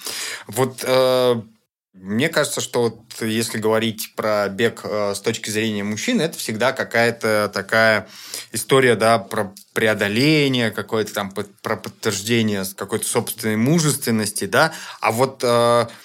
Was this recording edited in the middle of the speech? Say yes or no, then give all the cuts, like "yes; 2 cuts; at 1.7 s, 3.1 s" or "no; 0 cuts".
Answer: no; 0 cuts